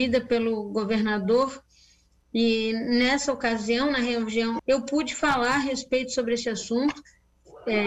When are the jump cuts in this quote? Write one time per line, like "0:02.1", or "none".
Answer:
0:04.6